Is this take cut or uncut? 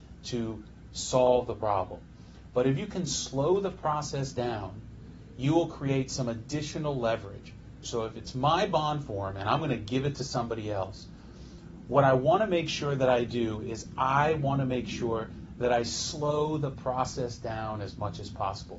cut